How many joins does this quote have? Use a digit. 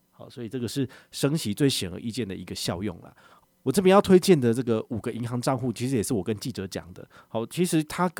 1